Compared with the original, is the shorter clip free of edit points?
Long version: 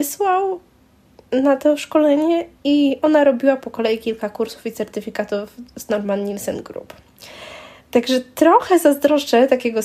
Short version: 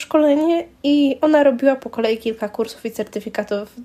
yes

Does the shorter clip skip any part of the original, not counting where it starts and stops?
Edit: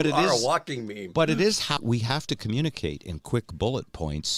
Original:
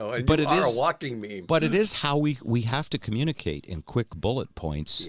yes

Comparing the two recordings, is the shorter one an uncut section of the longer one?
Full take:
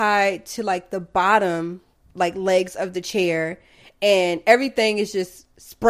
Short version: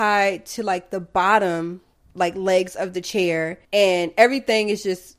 no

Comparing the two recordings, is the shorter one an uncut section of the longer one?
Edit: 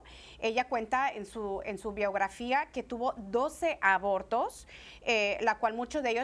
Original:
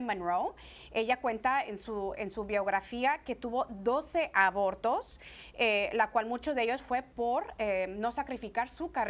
yes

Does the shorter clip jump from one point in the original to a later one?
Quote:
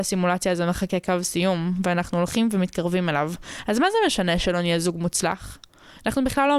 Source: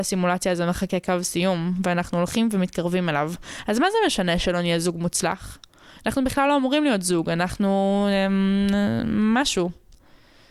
no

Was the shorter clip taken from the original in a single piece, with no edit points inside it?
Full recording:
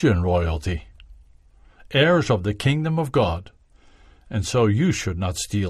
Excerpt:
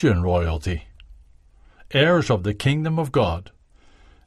yes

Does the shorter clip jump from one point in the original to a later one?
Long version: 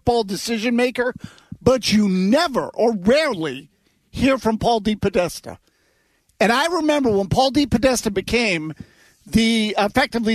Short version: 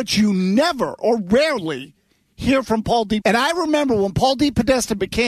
yes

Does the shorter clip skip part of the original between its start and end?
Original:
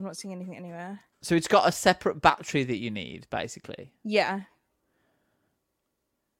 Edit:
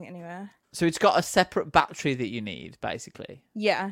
no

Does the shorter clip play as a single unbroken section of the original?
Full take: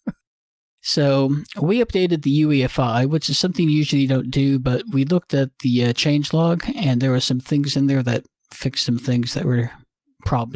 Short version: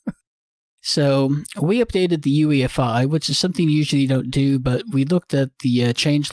yes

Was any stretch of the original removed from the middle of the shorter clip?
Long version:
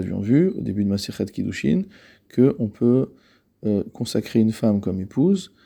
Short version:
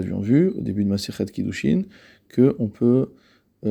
no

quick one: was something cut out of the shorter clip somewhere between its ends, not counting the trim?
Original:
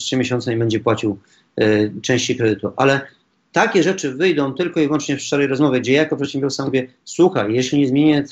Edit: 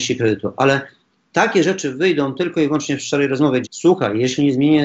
yes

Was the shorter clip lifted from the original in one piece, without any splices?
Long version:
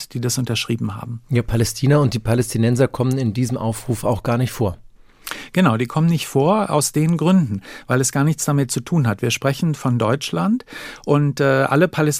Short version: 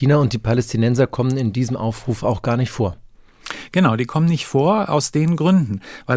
yes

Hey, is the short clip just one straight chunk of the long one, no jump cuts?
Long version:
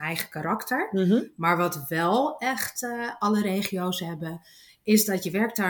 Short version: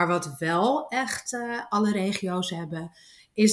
yes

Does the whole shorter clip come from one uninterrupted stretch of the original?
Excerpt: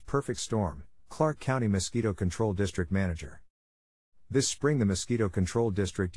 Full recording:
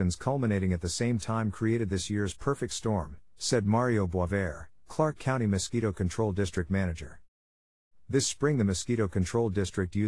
no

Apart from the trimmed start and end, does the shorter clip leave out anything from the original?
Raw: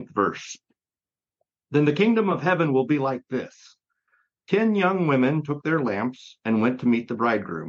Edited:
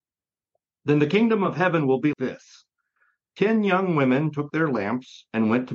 yes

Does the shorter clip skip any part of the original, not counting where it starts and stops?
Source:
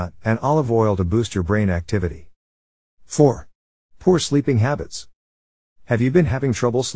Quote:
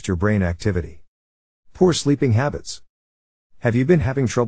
yes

